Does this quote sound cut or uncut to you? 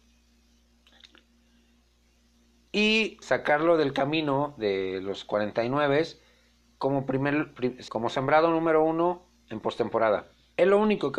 cut